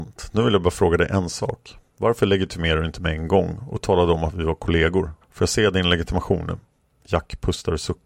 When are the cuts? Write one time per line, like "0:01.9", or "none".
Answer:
0:05.2